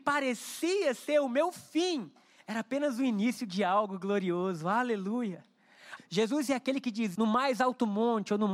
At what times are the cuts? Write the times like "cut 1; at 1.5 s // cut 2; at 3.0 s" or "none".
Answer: cut 1; at 6.0 s // cut 2; at 7.1 s